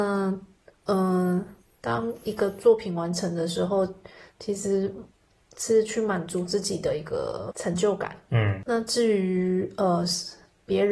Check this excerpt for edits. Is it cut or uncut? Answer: uncut